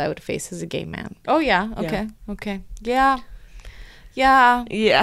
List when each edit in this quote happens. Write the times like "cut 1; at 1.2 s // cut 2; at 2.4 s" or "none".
cut 1; at 1.2 s